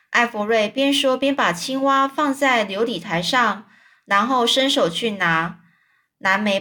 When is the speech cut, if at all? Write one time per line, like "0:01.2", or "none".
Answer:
none